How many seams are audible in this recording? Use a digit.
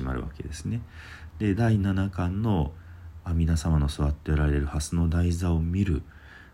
0